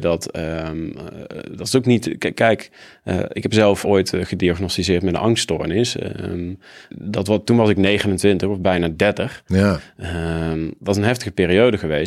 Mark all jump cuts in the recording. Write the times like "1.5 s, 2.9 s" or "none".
3.8 s, 6.9 s, 9.5 s